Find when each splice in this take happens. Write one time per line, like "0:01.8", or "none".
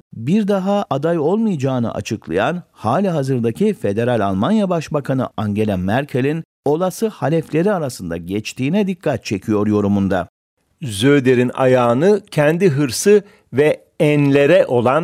none